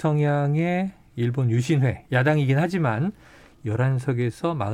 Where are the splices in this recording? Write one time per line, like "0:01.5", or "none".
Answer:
none